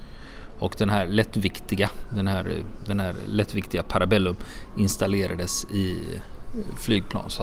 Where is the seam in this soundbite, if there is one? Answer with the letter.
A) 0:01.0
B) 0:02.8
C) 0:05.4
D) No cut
D